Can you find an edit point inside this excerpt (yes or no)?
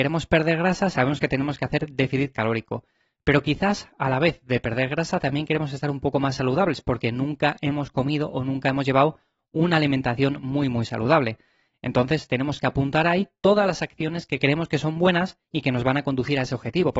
no